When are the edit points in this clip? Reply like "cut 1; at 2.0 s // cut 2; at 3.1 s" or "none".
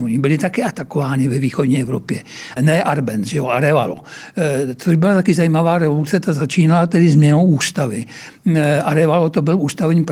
cut 1; at 2.6 s